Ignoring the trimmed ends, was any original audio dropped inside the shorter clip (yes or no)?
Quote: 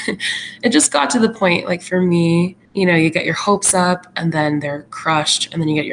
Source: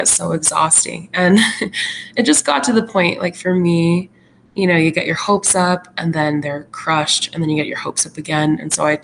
yes